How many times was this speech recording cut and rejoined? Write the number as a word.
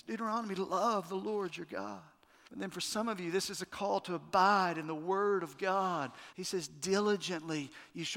two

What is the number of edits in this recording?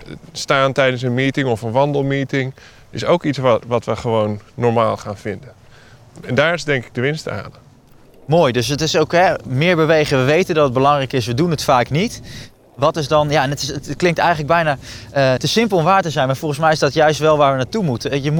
one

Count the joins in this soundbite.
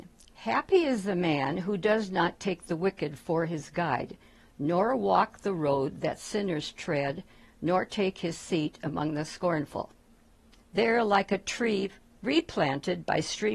one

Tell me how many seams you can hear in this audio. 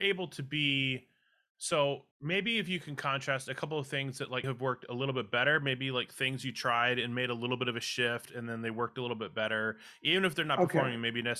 two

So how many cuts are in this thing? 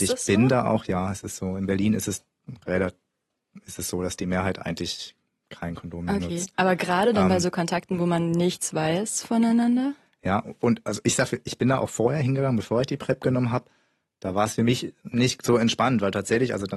zero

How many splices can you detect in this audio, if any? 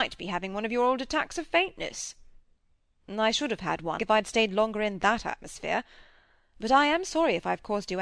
one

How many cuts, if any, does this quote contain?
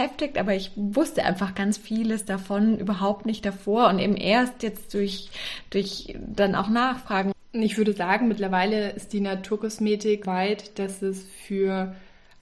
two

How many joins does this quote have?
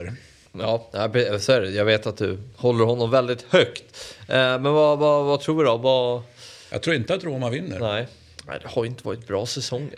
zero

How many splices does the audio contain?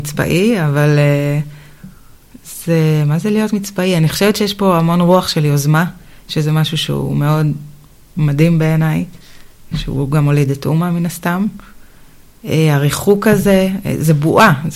one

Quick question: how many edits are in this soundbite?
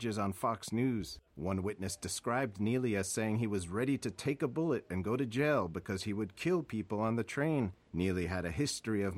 one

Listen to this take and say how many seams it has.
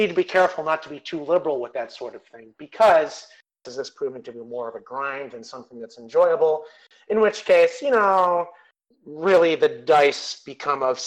one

